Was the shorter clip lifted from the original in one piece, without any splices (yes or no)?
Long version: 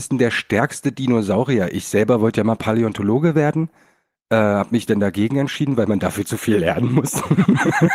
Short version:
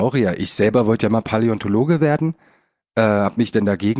yes